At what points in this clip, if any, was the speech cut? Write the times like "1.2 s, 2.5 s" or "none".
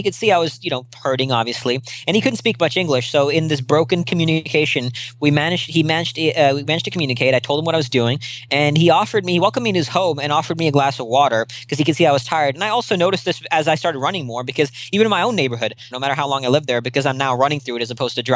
12.5 s, 15.9 s